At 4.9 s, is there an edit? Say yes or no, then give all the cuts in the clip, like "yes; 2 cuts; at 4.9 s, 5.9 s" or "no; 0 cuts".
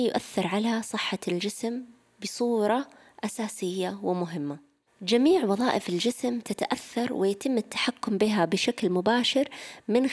yes; 1 cut; at 4.9 s